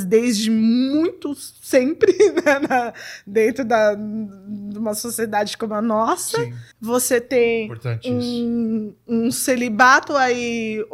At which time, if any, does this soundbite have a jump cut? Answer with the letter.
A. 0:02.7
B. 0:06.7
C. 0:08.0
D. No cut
B